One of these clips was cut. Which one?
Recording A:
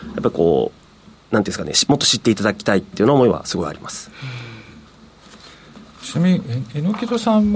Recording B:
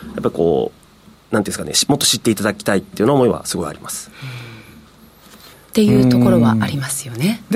B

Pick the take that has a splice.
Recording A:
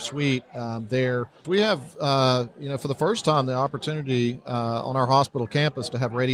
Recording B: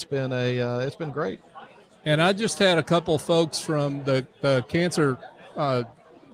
A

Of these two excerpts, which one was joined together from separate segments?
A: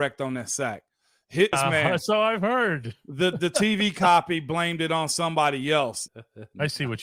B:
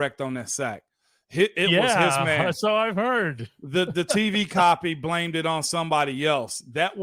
A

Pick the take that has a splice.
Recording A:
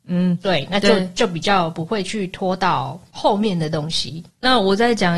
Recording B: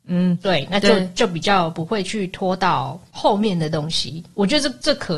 A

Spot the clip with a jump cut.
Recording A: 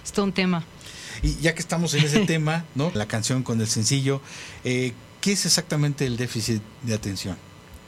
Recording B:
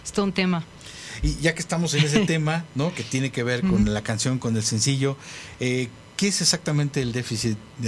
A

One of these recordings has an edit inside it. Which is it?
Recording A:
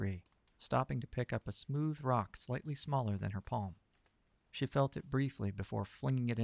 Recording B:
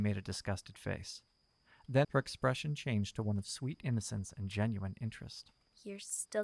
B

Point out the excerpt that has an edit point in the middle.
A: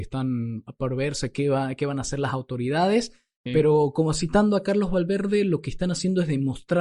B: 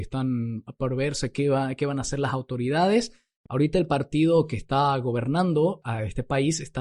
B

